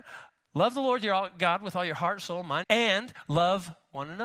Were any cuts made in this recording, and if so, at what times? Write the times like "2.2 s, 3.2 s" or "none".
2.6 s